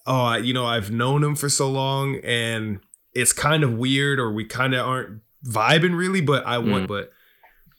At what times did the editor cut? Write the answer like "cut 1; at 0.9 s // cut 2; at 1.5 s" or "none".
cut 1; at 6.8 s

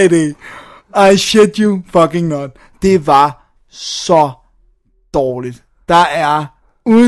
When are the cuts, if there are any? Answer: none

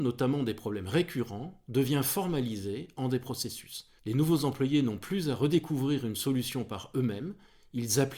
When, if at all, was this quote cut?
cut 1; at 4.0 s

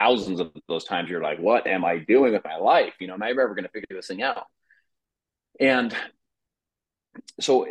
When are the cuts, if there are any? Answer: none

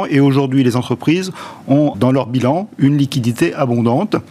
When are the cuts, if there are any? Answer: cut 1; at 1.9 s

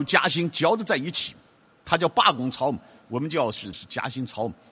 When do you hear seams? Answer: cut 1; at 3.7 s

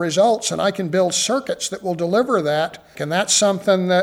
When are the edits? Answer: cut 1; at 3.0 s

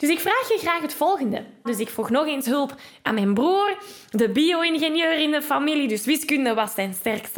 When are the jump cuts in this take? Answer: cut 1; at 1.7 s

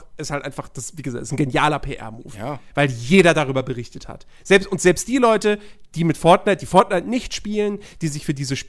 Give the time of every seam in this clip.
none

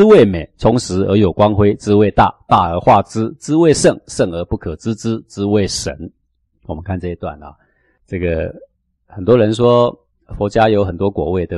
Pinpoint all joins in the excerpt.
none

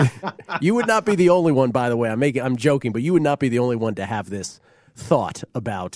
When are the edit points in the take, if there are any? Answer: none

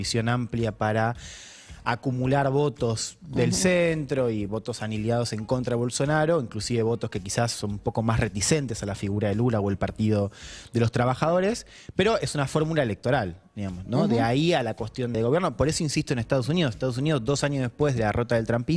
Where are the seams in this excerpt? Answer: cut 1; at 15.1 s

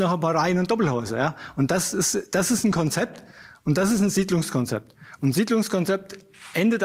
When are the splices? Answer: none

